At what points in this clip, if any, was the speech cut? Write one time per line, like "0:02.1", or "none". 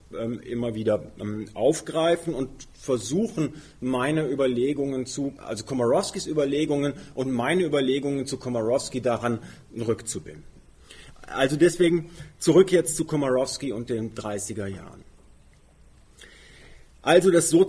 0:05.4